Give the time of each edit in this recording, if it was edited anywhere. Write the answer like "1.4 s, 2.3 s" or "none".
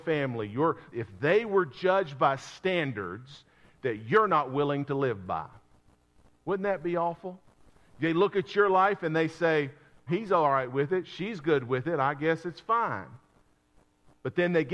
0.9 s, 10.1 s